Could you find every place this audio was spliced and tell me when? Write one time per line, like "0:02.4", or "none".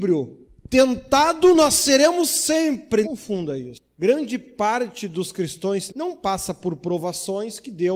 0:03.0
0:05.9

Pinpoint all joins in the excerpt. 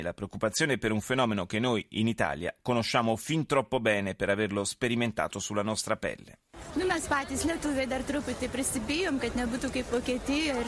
none

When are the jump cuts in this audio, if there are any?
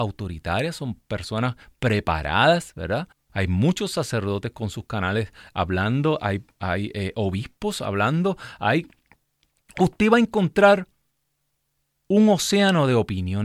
0:03.1

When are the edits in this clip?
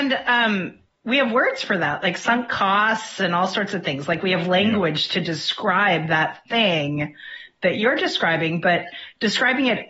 none

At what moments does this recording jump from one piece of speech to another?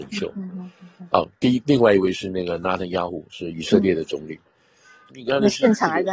0:05.1

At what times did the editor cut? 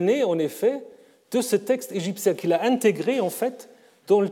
none

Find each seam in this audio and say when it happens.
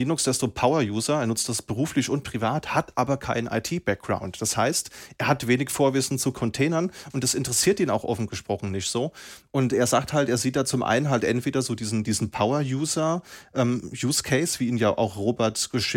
none

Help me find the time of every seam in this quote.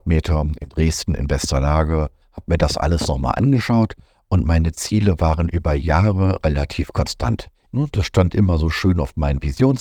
0:02.2
0:07.7

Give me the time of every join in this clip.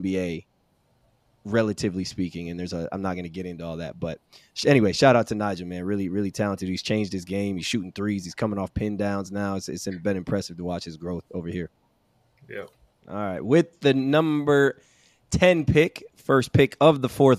0:13.0

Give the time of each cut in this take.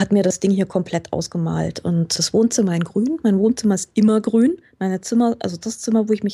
0:02.2

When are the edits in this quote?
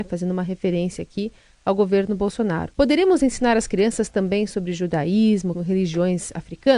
0:02.7
0:05.5

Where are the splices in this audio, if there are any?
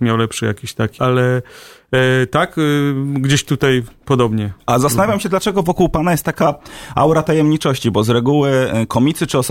0:01.0

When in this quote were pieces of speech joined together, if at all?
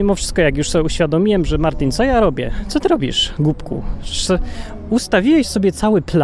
none

